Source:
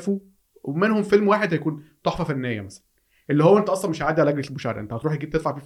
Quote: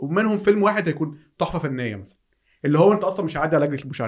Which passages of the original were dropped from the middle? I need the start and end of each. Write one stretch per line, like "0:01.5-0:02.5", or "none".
none

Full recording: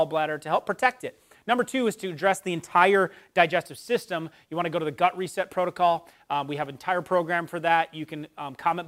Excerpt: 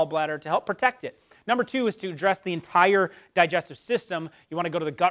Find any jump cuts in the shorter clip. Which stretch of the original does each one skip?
none

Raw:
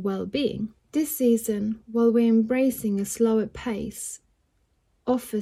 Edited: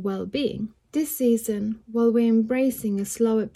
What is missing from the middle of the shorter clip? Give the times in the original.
none

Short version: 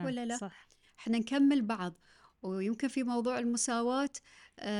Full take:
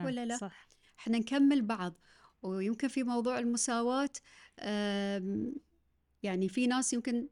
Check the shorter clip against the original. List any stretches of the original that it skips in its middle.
none

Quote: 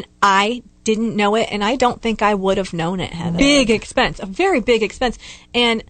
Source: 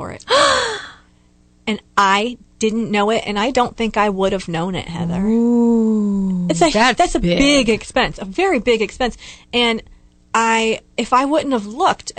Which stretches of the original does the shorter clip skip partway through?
0:05.1-0:07.4

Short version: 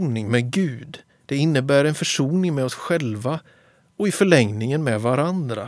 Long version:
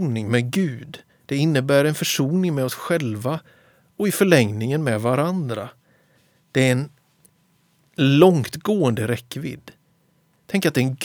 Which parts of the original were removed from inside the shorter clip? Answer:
none

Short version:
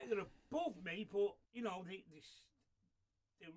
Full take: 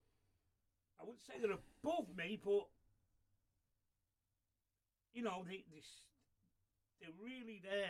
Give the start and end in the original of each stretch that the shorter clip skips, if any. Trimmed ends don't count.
0:02.8-0:05.1

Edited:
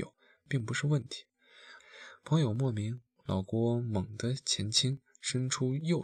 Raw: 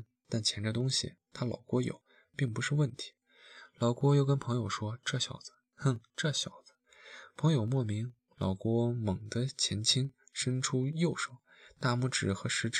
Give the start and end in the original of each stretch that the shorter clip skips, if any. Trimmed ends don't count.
0:03.7-0:06.9

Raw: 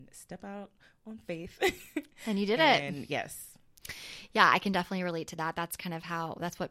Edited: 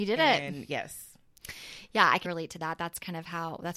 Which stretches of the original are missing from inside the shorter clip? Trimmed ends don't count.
0:04.6-0:05.0

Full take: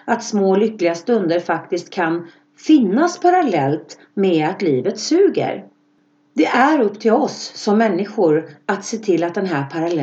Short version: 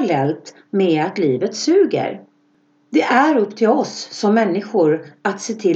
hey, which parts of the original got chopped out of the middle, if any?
none

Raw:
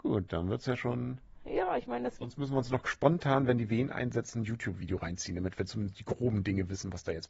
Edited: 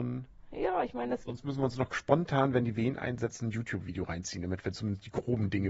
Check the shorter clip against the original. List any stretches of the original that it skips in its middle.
none

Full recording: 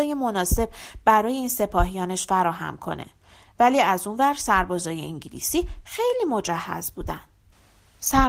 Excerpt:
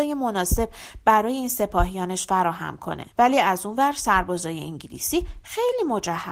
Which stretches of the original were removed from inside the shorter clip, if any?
0:03.1-0:03.5

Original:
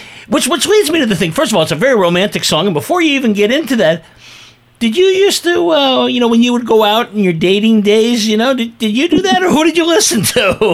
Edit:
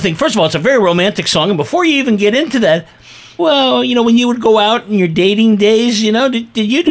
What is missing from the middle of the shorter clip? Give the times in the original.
0:04.6-0:05.6

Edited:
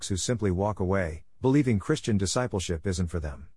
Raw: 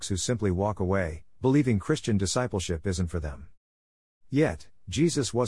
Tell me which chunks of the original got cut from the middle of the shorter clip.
none

